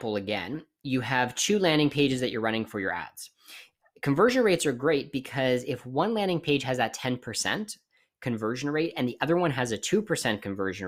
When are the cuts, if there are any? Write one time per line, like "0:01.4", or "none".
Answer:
none

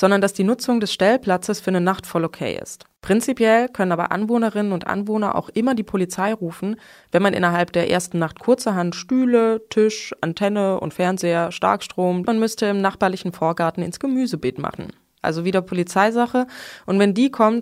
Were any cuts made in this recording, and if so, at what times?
0:12.2
0:15.2

